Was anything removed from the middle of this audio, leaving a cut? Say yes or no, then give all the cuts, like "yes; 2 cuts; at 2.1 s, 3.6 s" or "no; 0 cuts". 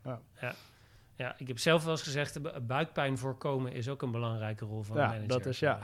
no; 0 cuts